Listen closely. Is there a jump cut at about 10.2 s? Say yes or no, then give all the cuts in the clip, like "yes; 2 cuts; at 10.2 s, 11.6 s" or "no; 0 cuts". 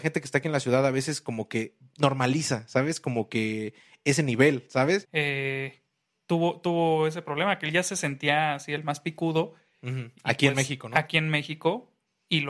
no; 1 cut; at 5.0 s